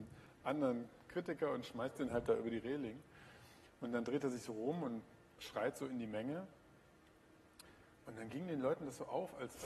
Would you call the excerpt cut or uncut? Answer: uncut